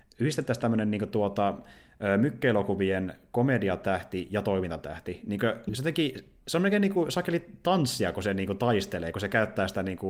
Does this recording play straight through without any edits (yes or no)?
yes